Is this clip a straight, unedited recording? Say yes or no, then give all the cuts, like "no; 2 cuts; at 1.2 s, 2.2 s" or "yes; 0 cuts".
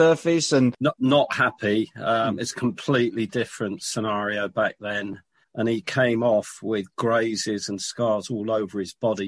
no; 1 cut; at 5.4 s